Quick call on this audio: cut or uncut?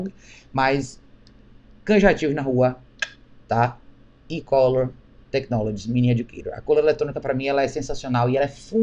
uncut